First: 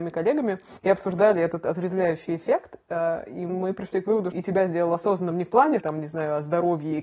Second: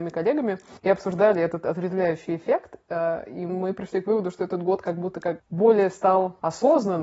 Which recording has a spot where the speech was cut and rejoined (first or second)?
first